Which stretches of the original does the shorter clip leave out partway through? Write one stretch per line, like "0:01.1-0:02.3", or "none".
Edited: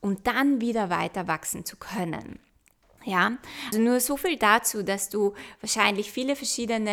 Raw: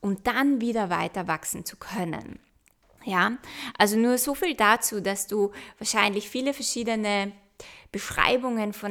0:03.7-0:03.9